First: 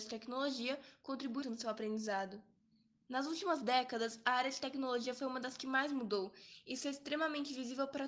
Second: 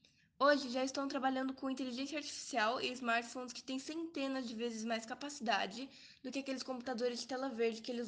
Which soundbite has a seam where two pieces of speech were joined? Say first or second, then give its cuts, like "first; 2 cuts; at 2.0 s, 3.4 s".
first; 1 cut; at 1.4 s